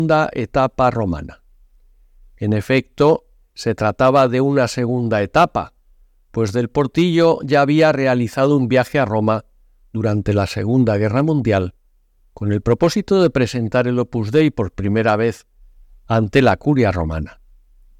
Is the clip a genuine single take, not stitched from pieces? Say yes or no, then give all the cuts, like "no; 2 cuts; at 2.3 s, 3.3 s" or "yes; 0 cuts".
yes; 0 cuts